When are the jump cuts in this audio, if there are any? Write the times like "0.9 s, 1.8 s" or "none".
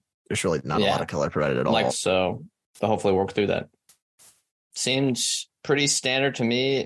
1.9 s, 4.7 s